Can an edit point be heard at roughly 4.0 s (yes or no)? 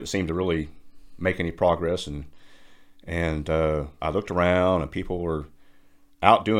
yes